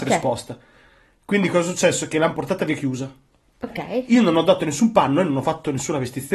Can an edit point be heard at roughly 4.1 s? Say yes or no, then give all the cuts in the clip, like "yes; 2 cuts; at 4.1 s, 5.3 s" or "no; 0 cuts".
no; 0 cuts